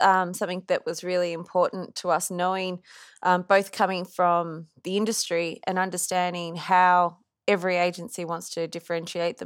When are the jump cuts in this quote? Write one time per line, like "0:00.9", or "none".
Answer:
none